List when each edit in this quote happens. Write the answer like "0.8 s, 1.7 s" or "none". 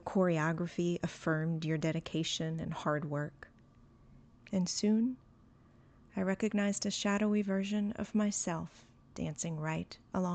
4.4 s